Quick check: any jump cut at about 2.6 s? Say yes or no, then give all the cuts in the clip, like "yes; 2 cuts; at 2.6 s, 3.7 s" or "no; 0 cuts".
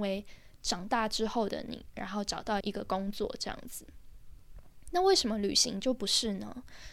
yes; 1 cut; at 2.6 s